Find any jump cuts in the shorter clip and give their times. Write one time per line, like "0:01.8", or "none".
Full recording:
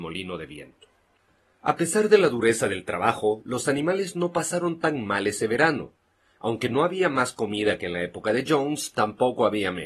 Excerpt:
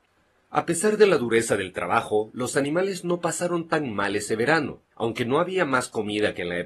0:04.9